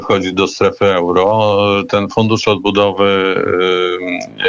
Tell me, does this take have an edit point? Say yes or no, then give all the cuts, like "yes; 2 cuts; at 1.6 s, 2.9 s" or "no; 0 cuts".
no; 0 cuts